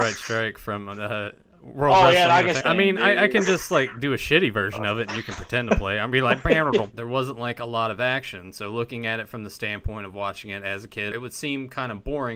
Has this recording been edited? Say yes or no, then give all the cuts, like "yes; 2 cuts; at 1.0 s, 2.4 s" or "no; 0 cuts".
yes; 3 cuts; at 2.6 s, 6.9 s, 11.1 s